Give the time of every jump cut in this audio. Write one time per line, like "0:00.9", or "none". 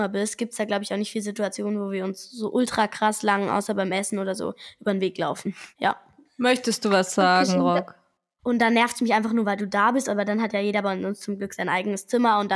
0:05.7
0:08.4